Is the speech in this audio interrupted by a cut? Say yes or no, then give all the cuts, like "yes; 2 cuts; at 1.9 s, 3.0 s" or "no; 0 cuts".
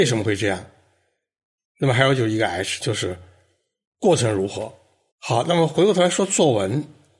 yes; 2 cuts; at 2.8 s, 5.1 s